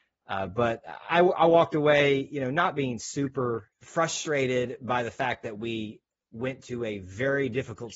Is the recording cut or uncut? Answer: cut